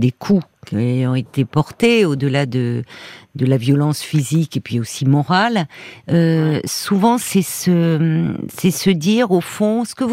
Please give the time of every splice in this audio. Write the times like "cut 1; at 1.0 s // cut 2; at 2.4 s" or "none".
none